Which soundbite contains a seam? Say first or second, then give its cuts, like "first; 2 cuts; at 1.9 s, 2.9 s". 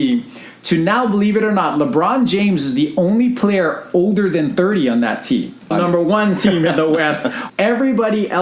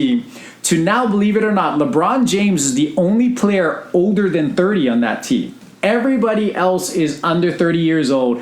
first; 2 cuts; at 5.7 s, 7.5 s